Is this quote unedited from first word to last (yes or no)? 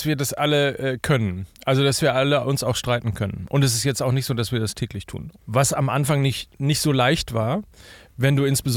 no